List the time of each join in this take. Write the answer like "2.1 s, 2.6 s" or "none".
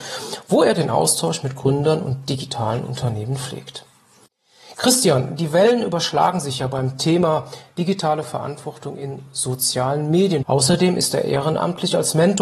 4.7 s, 10.4 s